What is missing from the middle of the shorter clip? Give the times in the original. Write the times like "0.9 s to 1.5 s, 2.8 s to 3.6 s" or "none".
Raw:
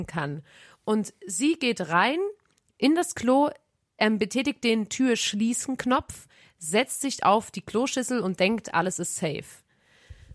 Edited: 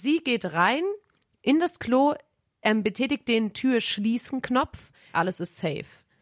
6.5 s to 8.7 s